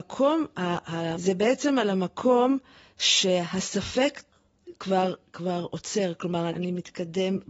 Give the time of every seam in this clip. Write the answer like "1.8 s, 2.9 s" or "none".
1.1 s, 6.5 s